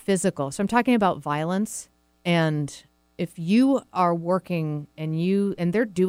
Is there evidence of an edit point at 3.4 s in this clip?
no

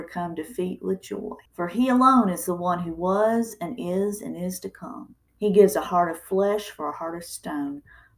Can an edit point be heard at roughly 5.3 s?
yes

